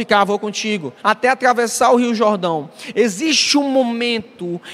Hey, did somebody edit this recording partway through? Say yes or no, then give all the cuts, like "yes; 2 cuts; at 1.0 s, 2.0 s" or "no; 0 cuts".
yes; 1 cut; at 1.0 s